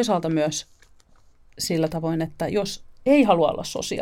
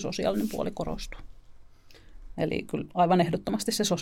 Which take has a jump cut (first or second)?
second